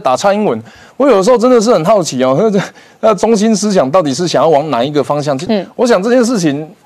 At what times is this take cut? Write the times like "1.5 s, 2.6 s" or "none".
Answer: 5.5 s

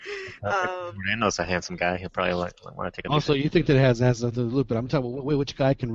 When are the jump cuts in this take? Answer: none

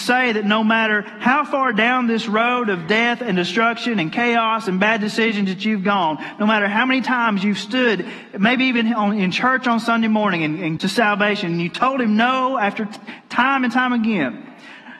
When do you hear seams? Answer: 10.8 s

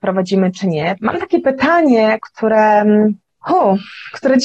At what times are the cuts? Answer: 1.0 s, 2.2 s

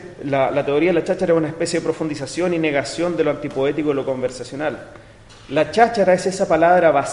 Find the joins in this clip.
none

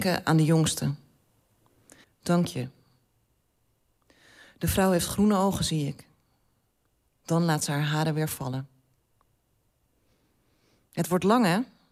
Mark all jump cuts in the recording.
2.0 s

